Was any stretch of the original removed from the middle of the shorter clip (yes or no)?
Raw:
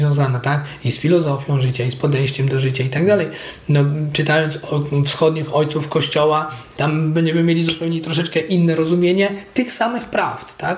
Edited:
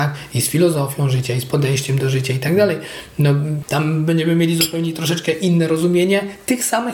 yes